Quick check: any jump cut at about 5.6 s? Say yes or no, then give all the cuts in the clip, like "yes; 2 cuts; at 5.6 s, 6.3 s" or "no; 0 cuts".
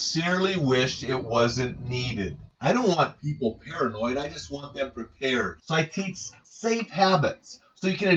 no; 1 cut; at 2.5 s